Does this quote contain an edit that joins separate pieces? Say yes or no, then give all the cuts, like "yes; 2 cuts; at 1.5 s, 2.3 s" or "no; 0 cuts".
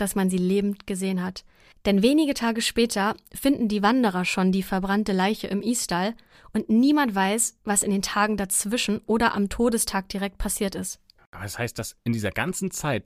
no; 0 cuts